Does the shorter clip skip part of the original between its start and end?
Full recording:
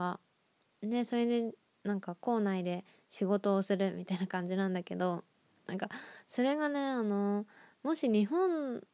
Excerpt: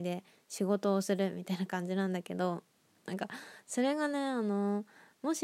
no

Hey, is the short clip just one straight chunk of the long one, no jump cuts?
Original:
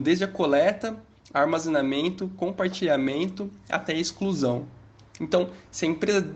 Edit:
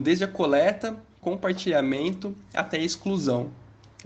no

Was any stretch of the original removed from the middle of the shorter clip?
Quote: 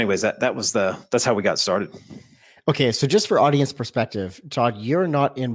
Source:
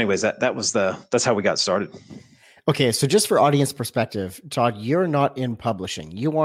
no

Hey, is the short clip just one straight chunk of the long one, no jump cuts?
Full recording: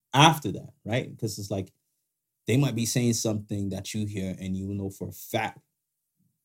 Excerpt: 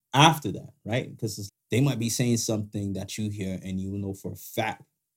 no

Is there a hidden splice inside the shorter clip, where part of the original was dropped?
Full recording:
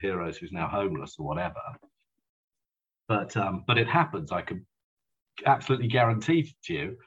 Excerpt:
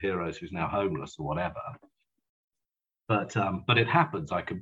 no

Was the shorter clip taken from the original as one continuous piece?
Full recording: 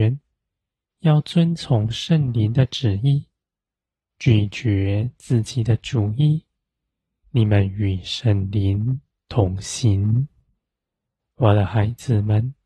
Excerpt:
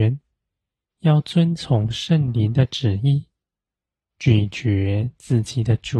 yes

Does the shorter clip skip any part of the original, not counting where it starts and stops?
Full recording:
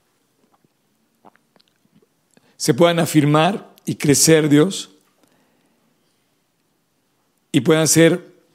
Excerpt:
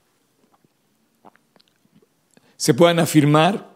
no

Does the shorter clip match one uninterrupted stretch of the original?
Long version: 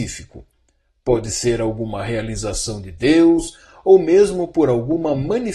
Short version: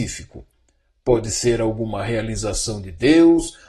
yes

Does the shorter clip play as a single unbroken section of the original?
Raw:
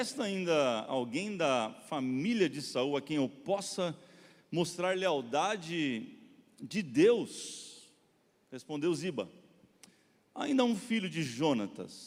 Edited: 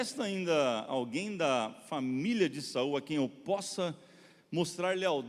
yes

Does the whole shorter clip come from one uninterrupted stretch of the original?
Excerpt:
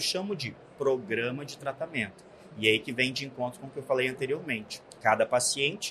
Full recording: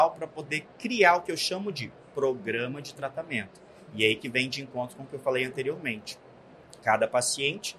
no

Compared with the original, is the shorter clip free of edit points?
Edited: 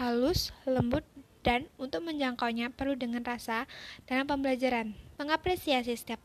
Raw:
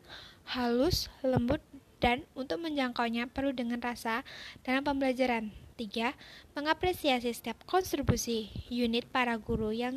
no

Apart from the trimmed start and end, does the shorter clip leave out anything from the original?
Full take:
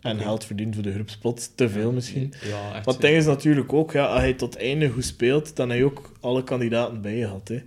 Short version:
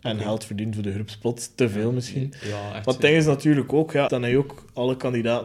yes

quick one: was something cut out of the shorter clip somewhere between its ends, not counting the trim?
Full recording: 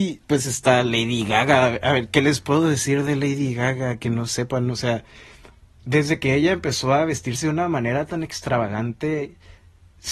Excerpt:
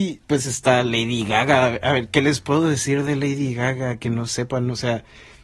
no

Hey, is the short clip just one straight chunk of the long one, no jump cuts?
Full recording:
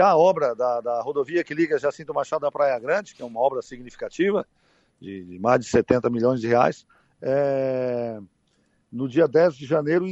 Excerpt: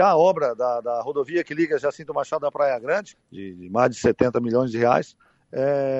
no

